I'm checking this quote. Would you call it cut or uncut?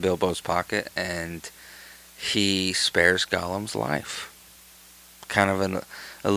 uncut